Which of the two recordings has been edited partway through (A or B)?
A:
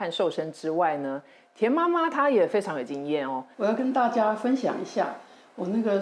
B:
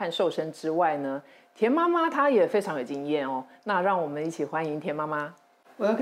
A